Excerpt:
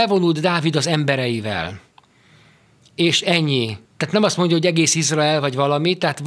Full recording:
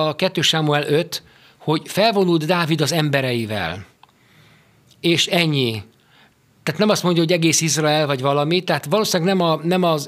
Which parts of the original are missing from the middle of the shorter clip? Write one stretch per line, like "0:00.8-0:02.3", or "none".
0:05.9-0:06.5